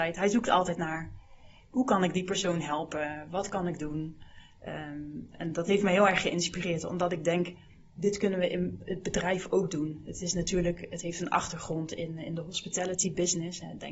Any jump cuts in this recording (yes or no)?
no